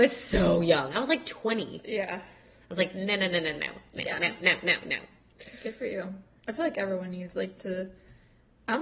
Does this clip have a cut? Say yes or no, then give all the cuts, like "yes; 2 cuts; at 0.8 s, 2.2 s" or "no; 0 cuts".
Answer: no; 0 cuts